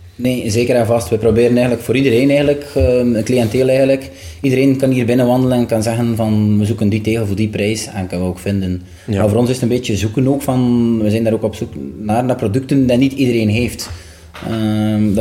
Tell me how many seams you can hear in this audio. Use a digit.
0